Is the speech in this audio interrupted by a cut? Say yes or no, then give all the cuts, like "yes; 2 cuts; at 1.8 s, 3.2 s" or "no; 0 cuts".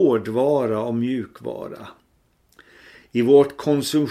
no; 0 cuts